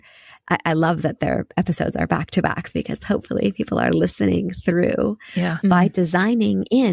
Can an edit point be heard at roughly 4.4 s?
no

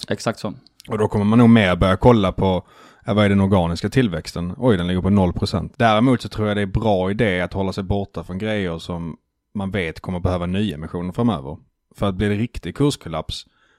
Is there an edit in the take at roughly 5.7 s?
yes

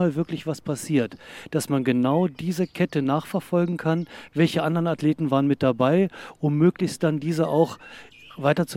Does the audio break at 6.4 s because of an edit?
no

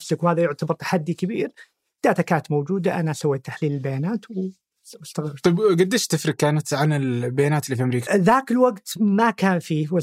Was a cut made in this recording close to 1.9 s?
no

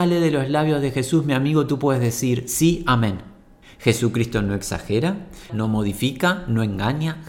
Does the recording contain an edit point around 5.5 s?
yes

